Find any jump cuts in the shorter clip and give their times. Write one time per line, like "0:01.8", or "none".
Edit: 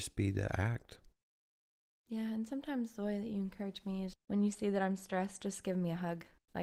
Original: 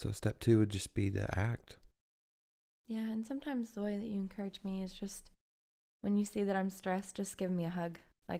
0:04.1